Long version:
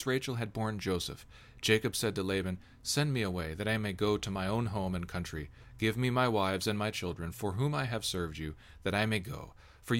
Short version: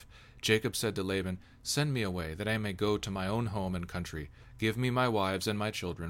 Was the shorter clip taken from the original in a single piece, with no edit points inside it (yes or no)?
yes